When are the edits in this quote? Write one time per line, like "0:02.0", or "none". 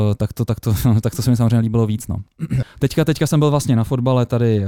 0:02.6